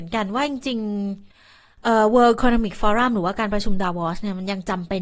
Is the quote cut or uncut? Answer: uncut